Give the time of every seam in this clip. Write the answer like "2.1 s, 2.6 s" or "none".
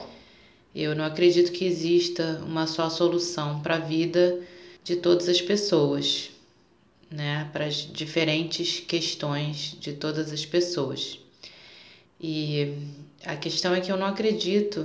4.8 s, 12.1 s

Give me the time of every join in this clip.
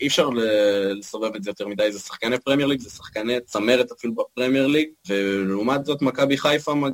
5.0 s

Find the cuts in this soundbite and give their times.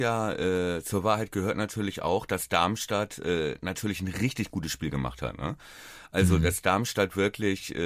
none

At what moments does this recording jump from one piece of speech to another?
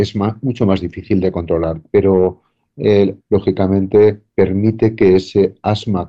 3.2 s, 4.3 s

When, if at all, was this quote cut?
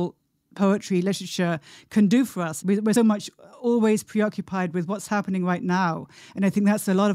3.0 s

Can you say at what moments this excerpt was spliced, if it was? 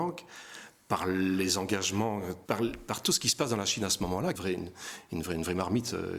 2.4 s, 4.3 s

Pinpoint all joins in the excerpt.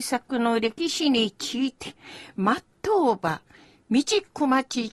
none

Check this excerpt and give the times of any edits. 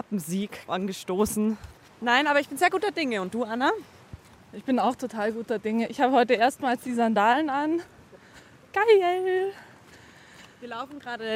1.9 s

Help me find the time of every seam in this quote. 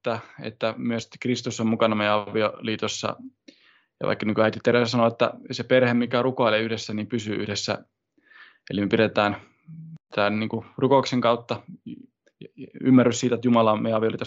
none

